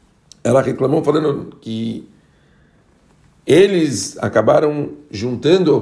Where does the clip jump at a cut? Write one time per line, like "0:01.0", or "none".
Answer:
none